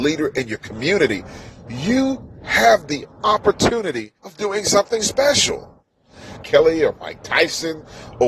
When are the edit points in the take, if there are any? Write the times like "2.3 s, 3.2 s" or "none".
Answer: 4.2 s, 6.4 s